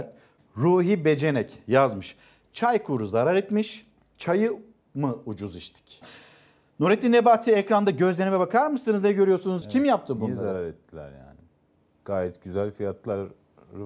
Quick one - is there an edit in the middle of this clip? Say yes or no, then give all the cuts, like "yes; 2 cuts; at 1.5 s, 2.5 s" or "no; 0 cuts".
yes; 2 cuts; at 6.0 s, 9.6 s